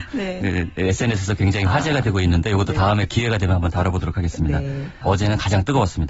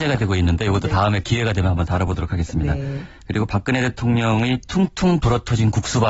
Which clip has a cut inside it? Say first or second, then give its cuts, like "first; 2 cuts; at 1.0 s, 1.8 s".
first; 1 cut; at 5.0 s